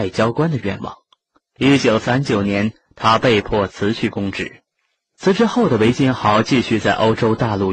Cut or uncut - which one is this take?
cut